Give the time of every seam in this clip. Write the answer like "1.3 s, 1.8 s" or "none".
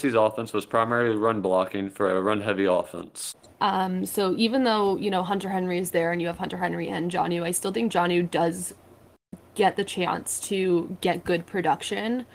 3.5 s